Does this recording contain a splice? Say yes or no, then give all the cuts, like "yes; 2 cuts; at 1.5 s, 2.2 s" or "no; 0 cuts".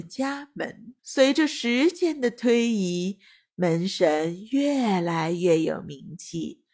yes; 1 cut; at 1.0 s